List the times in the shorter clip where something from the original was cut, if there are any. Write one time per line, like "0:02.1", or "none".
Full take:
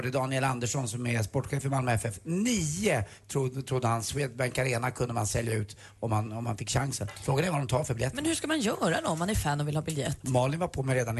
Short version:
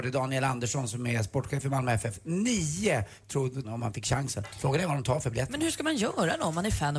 0:03.6